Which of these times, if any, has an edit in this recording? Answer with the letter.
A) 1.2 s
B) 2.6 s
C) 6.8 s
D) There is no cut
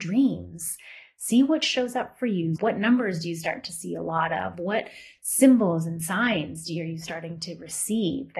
B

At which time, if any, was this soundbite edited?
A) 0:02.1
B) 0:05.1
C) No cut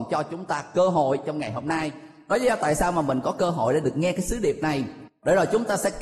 C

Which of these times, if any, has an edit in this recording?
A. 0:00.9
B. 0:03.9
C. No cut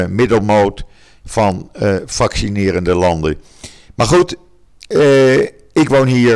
B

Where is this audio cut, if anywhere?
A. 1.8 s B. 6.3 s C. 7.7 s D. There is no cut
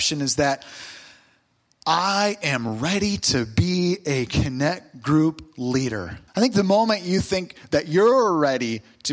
B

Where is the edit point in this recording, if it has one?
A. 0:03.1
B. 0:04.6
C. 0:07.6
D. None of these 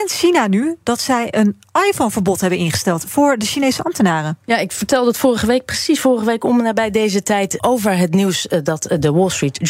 C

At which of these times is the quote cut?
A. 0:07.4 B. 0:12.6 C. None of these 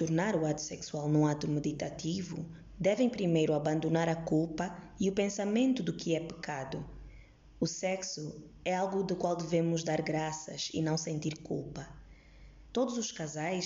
C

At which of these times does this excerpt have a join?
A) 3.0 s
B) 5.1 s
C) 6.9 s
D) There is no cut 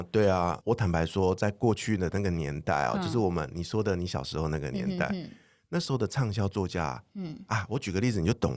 D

